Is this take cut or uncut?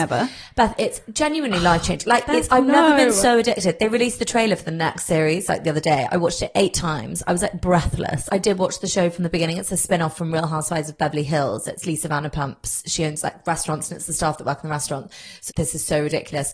cut